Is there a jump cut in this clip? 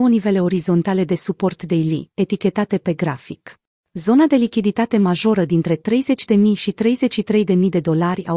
yes; 1 cut; at 3.8 s

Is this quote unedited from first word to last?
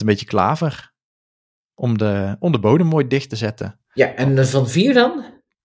yes; 0 cuts

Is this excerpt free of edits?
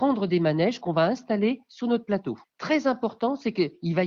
yes; 0 cuts

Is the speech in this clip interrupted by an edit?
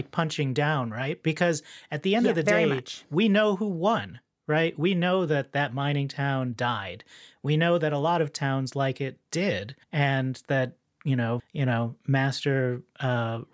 yes; 2 cuts; at 9.8 s, 11.4 s

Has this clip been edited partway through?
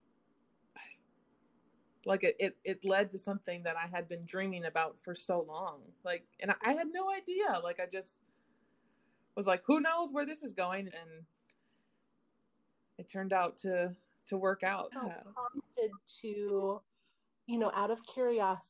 yes; 2 cuts; at 10.9 s, 14.9 s

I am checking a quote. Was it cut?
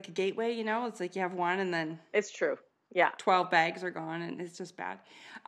no; 0 cuts

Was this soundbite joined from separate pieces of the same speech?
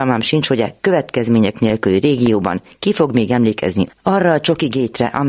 yes; 1 cut; at 3.9 s

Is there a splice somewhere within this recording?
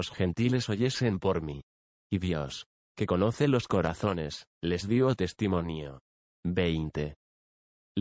yes; 3 cuts; at 2.0 s, 4.5 s, 6.3 s

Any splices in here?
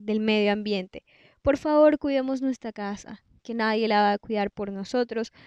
no; 0 cuts

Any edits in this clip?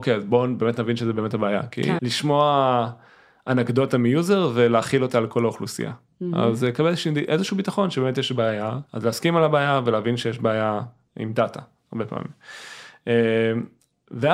yes; 2 cuts; at 2.0 s, 8.9 s

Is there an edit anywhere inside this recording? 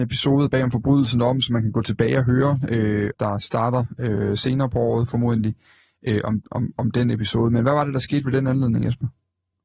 yes; 1 cut; at 3.1 s

